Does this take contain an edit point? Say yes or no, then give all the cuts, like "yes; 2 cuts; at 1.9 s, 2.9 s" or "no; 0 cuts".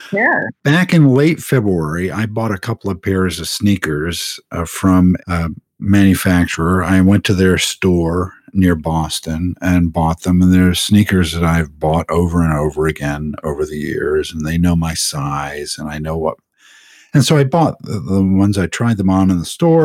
no; 0 cuts